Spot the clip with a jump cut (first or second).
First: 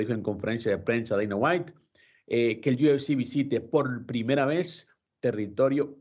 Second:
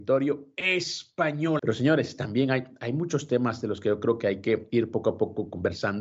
second